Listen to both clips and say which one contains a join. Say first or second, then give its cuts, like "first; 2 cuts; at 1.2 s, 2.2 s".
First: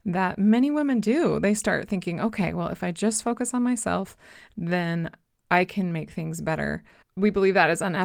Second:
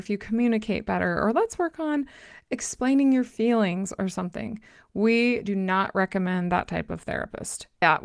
first; 1 cut; at 7.0 s